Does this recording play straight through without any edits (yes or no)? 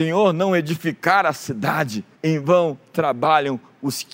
no